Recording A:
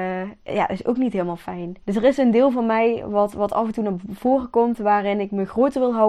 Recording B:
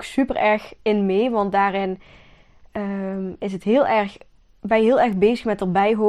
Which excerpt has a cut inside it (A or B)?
A